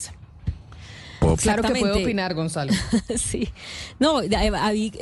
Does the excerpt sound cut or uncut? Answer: cut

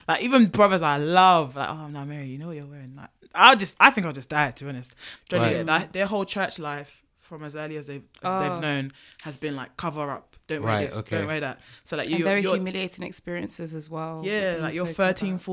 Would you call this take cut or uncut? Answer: cut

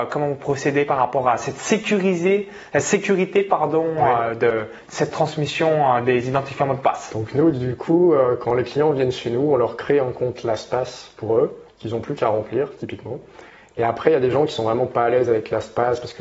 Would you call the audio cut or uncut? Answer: uncut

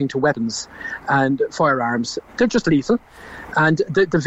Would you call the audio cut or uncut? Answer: cut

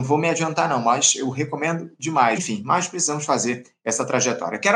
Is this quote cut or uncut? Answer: cut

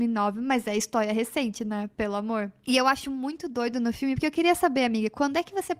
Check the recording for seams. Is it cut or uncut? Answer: uncut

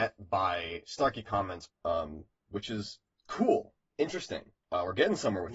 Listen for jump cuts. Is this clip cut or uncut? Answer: cut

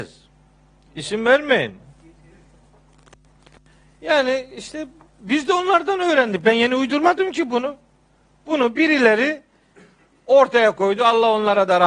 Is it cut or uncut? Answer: uncut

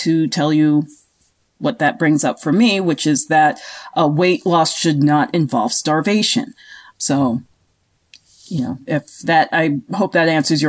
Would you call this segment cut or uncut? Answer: cut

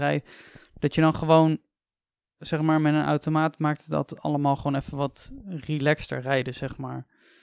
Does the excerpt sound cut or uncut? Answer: uncut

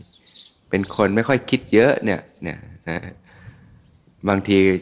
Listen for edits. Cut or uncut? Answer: cut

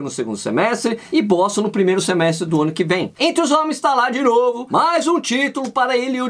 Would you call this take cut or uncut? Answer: cut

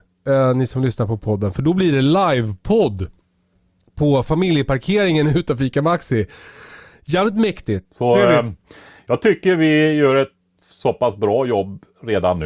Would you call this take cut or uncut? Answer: cut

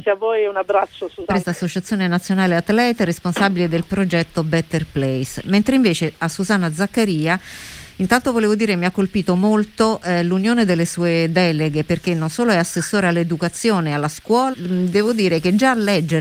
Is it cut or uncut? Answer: cut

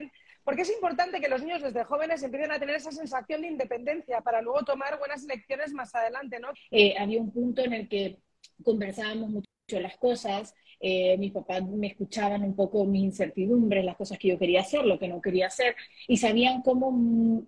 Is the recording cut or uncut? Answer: cut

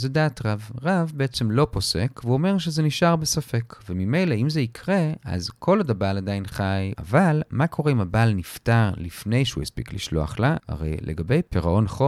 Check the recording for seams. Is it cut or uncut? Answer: cut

